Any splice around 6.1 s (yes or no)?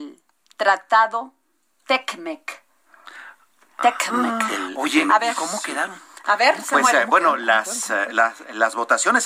no